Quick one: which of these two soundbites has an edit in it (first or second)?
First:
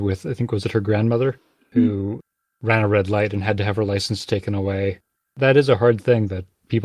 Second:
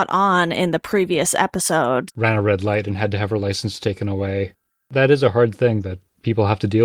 second